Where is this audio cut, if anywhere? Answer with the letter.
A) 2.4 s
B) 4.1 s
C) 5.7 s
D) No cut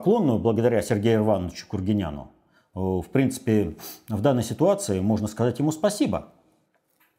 D